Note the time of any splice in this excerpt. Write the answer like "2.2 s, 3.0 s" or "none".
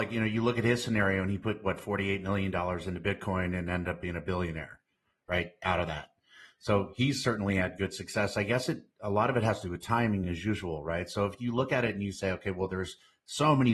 none